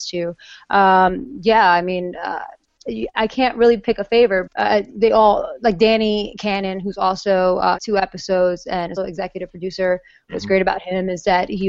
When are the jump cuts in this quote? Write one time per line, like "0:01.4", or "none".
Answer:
0:04.5
0:07.8
0:09.0

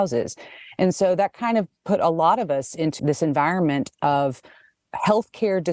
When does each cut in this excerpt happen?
0:03.0

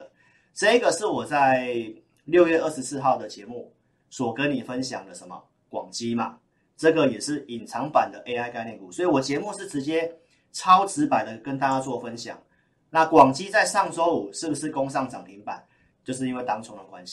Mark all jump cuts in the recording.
0:15.9

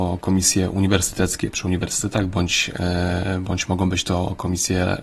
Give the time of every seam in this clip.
0:01.5

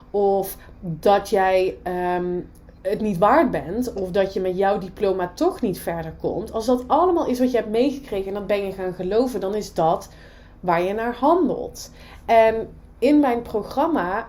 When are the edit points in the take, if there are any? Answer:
0:02.8

